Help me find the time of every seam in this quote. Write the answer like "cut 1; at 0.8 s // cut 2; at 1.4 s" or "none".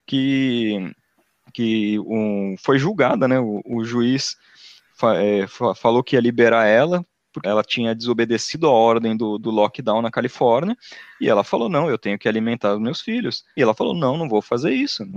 cut 1; at 7.4 s // cut 2; at 13.6 s